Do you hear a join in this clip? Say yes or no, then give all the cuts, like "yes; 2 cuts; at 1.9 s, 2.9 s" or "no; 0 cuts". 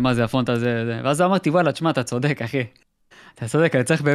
no; 0 cuts